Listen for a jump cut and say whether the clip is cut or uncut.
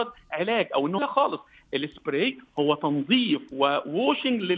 cut